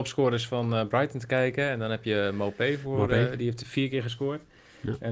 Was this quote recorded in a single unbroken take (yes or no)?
yes